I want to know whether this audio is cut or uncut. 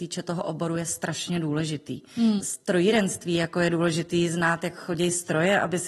cut